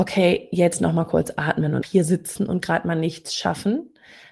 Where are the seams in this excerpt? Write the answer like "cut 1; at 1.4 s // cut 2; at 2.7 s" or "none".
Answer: cut 1; at 1.8 s